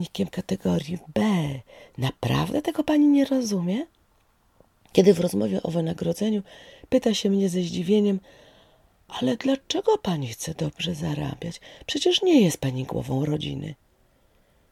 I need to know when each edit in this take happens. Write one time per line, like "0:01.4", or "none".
none